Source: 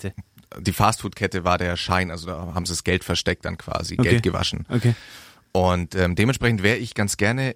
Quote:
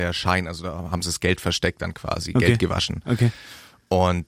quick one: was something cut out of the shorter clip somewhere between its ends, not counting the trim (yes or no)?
no